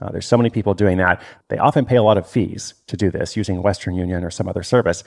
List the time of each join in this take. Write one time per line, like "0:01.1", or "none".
none